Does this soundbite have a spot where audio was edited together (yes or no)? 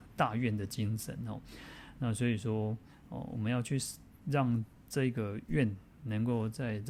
no